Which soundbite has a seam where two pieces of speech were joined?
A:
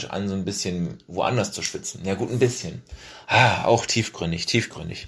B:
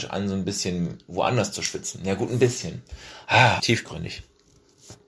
B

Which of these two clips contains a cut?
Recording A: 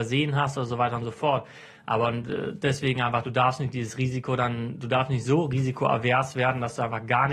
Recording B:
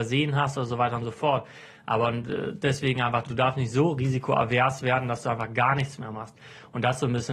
B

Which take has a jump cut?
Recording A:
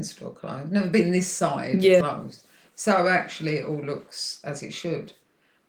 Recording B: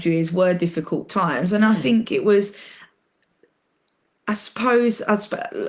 A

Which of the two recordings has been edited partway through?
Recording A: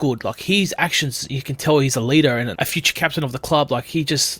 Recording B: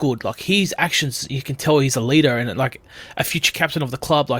A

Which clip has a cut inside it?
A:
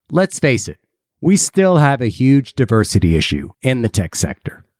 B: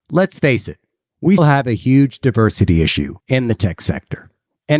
B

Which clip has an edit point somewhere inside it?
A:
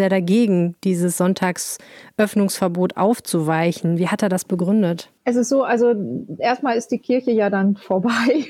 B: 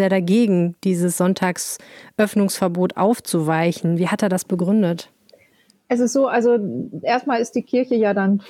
A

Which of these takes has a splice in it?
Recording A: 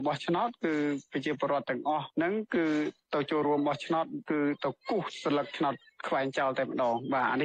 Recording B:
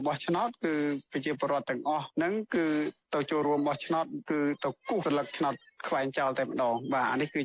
B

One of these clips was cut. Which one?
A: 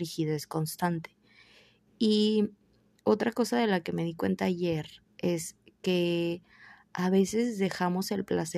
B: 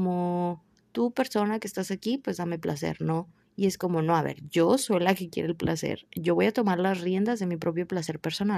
B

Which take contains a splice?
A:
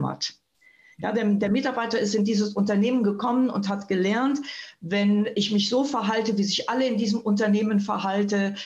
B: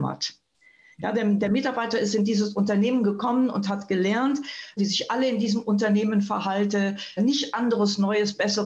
B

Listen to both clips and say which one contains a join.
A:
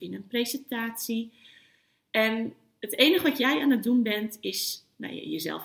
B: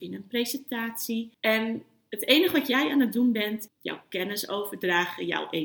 B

